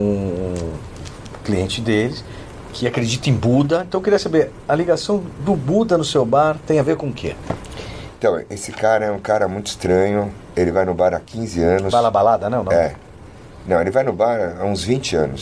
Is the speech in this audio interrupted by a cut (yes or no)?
no